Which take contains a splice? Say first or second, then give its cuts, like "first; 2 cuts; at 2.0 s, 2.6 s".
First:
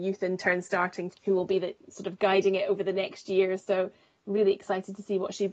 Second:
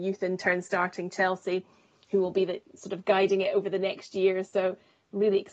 first; 1 cut; at 1.1 s